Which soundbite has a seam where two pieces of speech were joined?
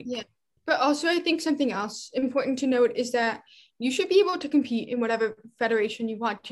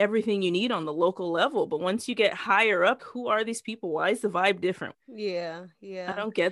second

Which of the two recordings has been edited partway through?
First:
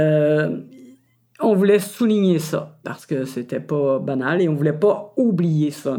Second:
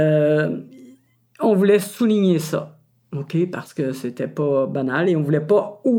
first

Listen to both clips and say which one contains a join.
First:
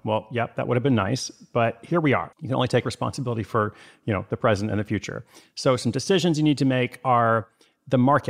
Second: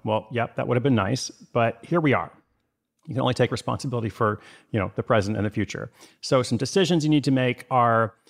first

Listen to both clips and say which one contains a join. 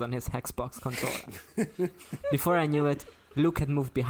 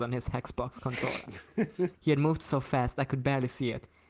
second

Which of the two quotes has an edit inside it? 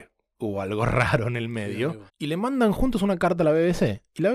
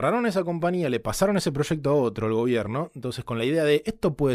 first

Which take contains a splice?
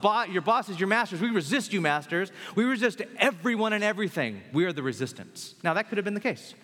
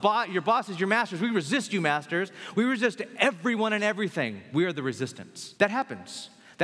second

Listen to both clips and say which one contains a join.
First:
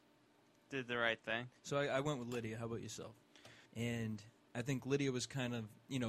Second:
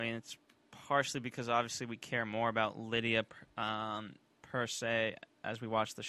first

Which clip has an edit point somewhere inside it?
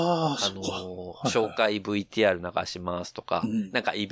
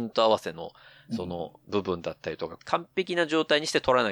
second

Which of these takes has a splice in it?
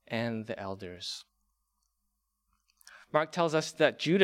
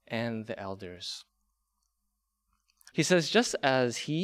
second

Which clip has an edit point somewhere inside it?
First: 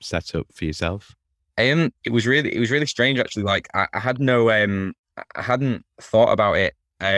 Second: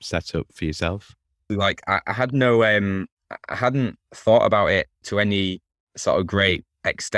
second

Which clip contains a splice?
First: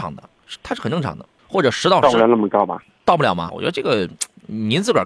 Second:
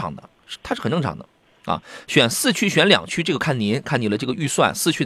first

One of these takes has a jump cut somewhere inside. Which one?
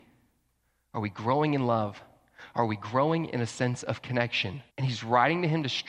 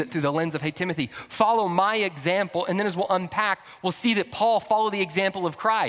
first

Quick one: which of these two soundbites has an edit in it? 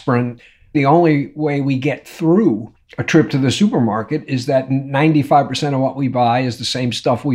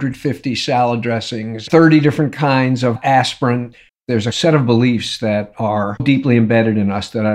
second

